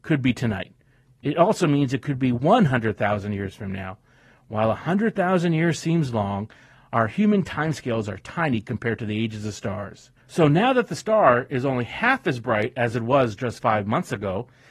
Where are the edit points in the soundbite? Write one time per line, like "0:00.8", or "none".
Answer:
0:10.2